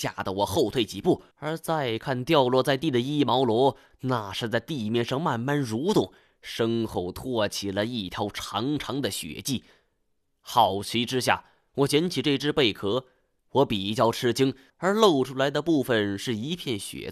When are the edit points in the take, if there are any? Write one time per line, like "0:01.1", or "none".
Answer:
0:01.3
0:13.4
0:14.7